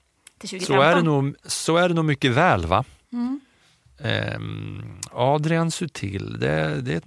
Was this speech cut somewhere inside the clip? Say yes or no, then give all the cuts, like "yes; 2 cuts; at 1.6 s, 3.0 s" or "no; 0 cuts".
no; 0 cuts